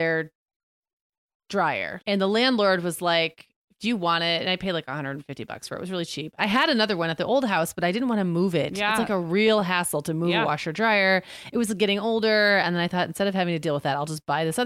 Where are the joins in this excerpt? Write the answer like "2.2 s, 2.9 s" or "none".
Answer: 2.0 s